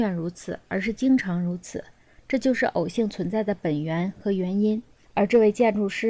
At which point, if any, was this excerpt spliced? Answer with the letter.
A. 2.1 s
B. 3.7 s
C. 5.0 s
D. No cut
C